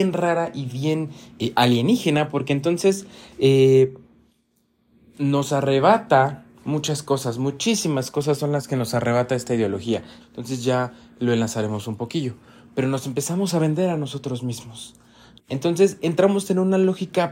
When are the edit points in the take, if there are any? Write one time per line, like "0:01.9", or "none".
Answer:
0:10.2
0:15.4